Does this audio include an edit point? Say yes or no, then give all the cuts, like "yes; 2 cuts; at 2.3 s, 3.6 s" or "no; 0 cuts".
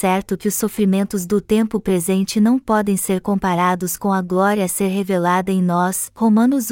no; 0 cuts